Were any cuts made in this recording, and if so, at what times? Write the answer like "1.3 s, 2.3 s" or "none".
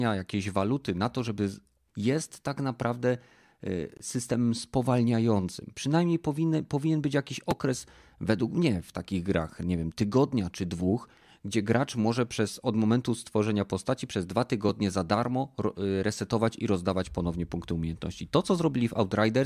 1.9 s